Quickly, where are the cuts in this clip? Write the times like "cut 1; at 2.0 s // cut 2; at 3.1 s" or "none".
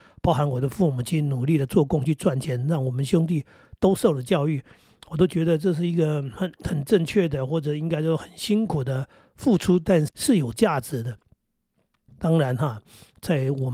cut 1; at 10.1 s // cut 2; at 12.1 s